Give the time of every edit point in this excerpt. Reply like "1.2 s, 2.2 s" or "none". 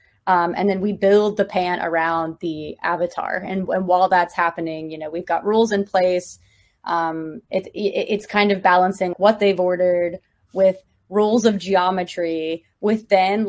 7.4 s, 9.1 s